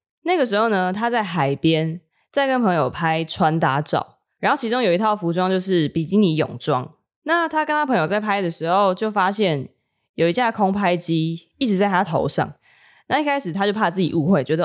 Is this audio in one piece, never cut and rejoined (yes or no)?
yes